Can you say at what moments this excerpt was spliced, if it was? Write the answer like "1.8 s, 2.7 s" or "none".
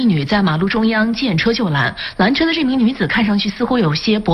none